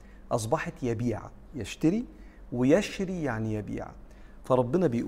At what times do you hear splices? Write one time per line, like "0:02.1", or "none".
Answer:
0:01.5

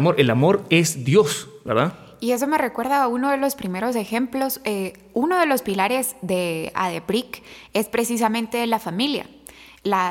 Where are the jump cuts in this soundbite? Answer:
none

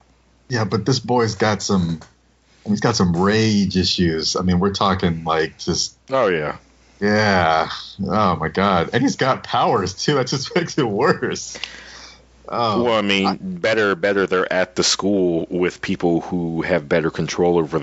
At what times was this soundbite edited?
0:06.0

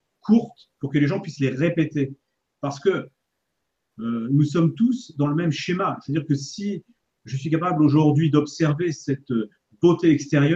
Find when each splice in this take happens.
none

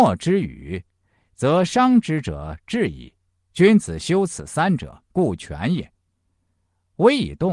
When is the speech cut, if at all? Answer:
0:03.4
0:05.0

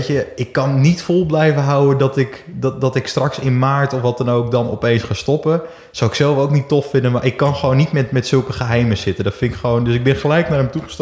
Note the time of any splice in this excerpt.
none

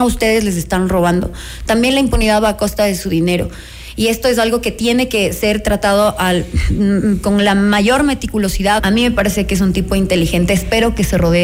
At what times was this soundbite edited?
0:08.8

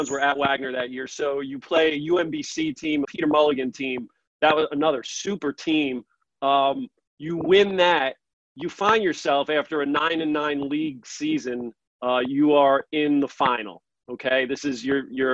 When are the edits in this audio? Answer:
0:03.0

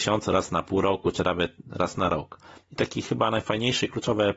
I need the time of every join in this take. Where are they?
0:02.6

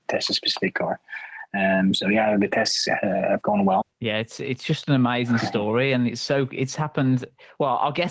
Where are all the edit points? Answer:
0:03.8

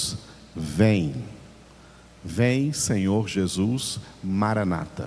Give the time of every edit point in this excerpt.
none

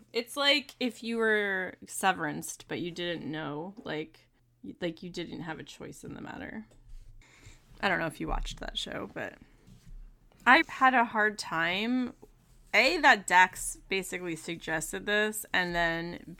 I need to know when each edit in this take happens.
0:10.6

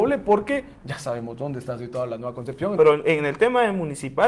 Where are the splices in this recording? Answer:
0:02.8

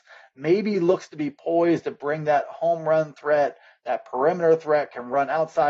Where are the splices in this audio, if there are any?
none

